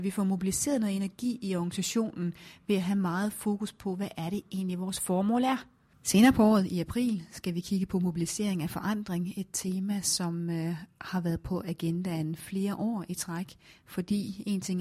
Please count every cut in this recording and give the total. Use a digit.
1